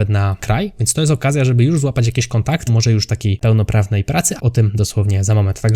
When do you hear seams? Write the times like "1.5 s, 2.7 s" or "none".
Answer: 2.7 s, 4.4 s